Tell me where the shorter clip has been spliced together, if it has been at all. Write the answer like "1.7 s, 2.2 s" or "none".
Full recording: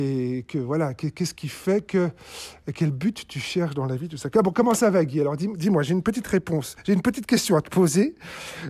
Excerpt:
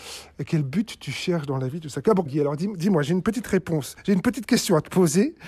2.3 s